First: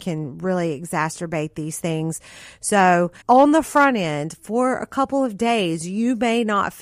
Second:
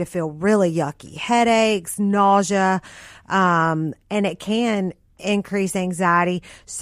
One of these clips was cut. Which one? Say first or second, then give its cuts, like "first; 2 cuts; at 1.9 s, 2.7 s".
first; 1 cut; at 3.2 s